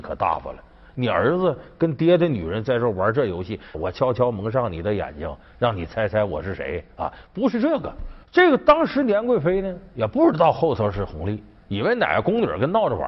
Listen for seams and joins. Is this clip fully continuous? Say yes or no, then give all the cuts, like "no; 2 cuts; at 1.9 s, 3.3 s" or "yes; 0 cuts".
no; 2 cuts; at 3.7 s, 8.2 s